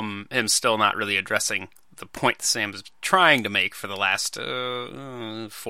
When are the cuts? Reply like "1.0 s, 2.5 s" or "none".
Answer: none